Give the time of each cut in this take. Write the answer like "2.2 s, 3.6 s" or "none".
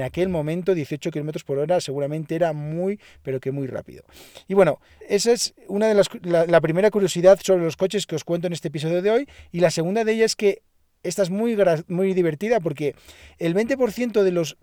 5.0 s